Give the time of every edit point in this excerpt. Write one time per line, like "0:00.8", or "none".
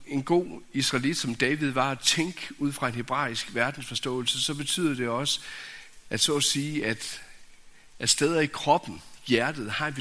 none